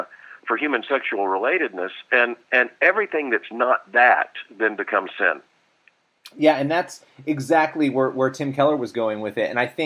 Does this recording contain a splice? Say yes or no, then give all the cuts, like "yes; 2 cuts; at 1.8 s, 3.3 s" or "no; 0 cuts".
no; 0 cuts